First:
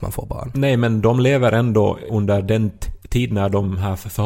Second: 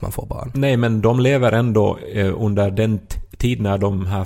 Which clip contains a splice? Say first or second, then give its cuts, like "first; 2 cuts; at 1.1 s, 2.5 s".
first; 1 cut; at 2.1 s